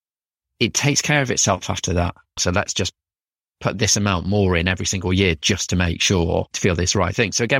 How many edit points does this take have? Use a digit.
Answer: 1